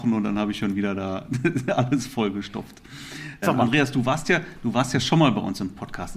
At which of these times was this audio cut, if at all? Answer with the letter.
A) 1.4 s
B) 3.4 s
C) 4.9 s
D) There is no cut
B